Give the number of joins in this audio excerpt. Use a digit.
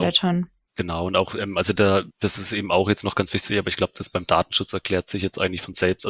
1